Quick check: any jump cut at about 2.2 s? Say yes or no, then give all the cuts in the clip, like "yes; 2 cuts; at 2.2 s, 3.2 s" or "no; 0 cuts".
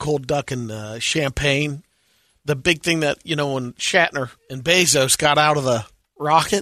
no; 1 cut; at 4.4 s